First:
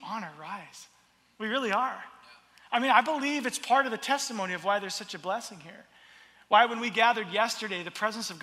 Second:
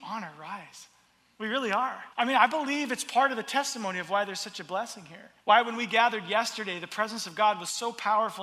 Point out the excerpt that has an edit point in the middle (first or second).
second